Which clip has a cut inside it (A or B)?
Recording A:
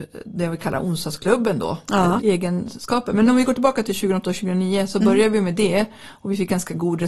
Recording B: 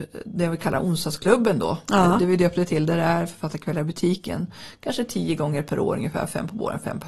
A